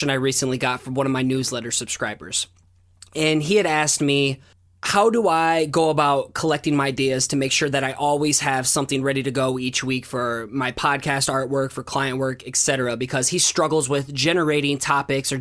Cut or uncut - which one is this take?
uncut